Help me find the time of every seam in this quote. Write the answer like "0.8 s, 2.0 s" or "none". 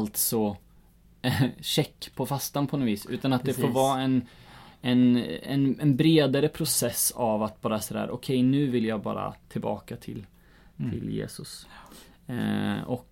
9.4 s